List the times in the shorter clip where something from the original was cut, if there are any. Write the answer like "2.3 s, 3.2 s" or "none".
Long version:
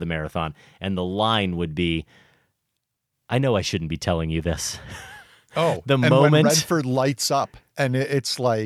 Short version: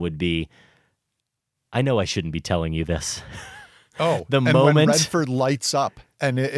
none